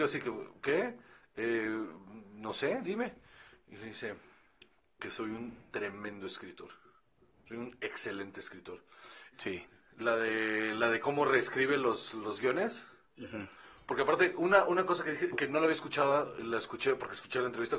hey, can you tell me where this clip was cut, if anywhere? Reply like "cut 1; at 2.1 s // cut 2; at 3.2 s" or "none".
cut 1; at 9.3 s